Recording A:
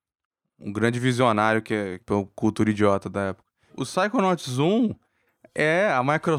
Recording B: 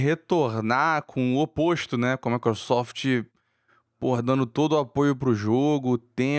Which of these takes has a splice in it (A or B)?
A